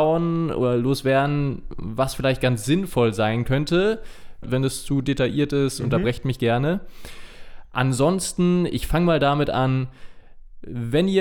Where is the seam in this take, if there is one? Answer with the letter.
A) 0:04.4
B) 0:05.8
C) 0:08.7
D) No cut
A